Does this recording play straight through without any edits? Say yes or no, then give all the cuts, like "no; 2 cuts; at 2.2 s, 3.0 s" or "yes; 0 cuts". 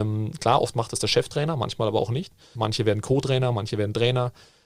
no; 1 cut; at 2.6 s